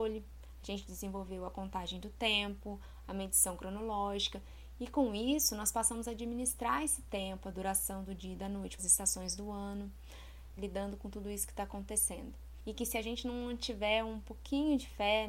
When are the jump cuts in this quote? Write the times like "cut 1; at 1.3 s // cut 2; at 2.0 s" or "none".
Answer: cut 1; at 8.8 s // cut 2; at 10.6 s